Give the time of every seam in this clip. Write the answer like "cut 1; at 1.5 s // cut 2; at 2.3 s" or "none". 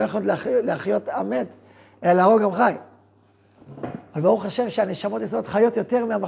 none